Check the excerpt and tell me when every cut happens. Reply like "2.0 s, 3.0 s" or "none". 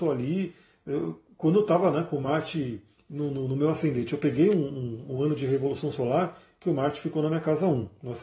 none